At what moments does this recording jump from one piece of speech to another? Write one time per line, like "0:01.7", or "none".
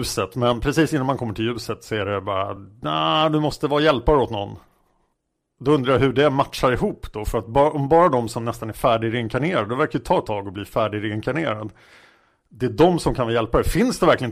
none